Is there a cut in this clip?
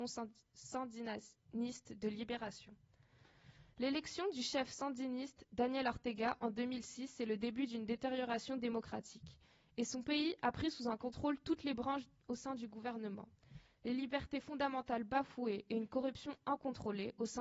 no; 0 cuts

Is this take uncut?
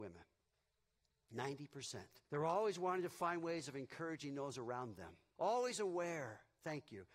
no; 2 cuts; at 2.2 s, 5.4 s

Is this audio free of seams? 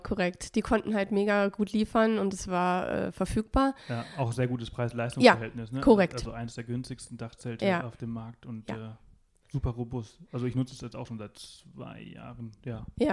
yes; 0 cuts

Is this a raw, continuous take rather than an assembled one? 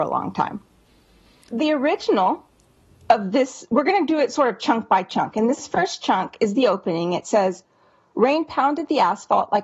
no; 1 cut; at 1.5 s

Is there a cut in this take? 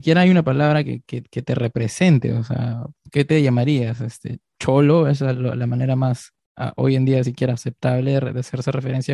no; 0 cuts

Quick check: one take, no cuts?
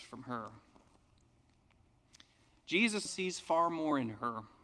no; 1 cut; at 3.1 s

